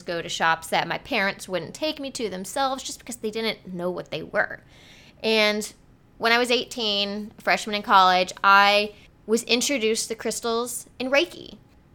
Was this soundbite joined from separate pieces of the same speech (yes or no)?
no